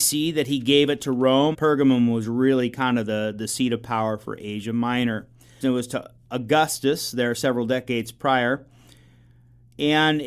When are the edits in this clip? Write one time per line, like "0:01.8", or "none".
0:01.5
0:05.6